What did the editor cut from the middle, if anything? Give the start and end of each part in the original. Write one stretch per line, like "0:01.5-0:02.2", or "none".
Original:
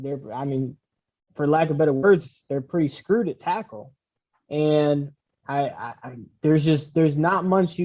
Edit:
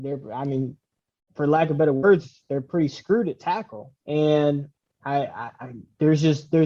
0:04.0-0:04.4